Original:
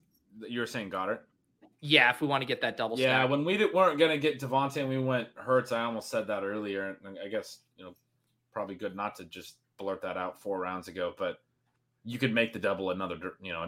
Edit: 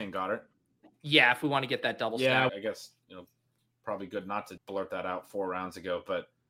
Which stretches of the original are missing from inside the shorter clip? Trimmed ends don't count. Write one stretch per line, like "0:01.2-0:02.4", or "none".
0:03.3-0:07.2
0:09.3-0:09.7